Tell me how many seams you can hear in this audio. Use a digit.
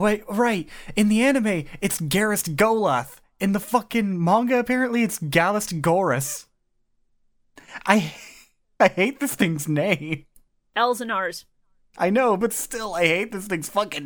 0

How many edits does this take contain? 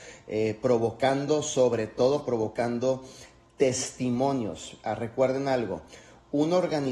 0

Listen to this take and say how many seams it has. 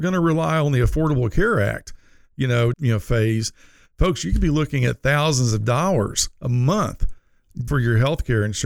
2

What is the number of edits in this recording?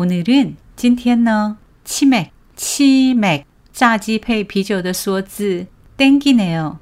0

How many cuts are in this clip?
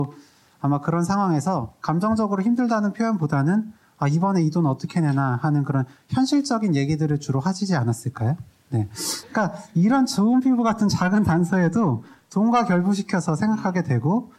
1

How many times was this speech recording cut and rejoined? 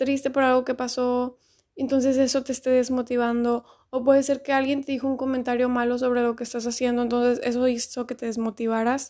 0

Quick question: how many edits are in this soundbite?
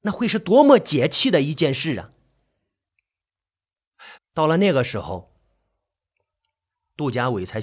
1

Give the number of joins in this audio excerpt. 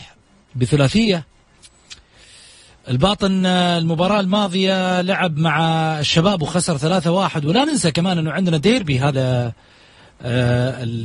1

